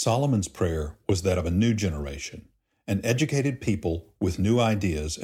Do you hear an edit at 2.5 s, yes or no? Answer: no